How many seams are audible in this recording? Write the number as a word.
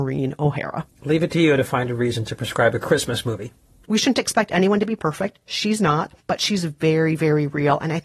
two